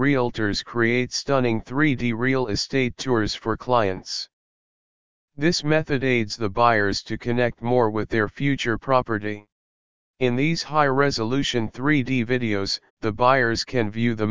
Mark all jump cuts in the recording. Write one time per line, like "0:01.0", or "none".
0:10.1
0:12.9